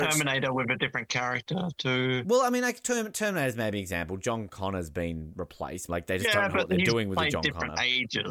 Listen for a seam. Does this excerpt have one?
yes; 1 cut; at 5.9 s

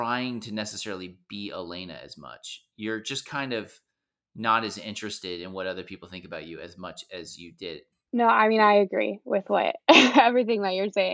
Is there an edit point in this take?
yes; 1 cut; at 7.9 s

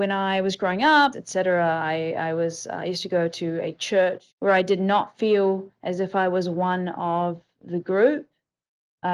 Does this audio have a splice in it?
yes; 2 cuts; at 1.1 s, 4.3 s

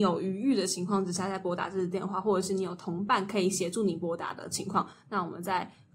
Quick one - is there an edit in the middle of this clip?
no; 0 cuts

